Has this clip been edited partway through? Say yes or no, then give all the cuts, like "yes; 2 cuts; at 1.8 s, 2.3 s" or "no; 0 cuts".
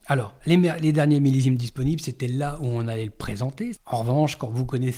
yes; 1 cut; at 3.8 s